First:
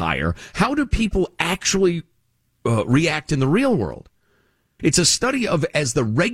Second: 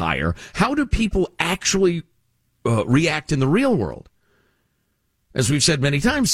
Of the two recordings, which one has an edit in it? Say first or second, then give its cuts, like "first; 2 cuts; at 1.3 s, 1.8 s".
first; 1 cut; at 4.8 s